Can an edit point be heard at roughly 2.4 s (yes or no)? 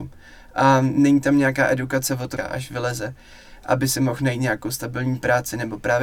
yes